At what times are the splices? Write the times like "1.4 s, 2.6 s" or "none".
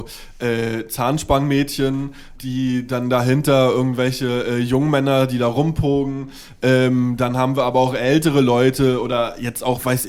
2.4 s